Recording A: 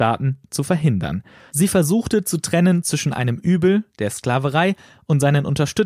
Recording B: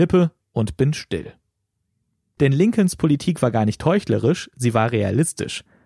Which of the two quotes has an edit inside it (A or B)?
B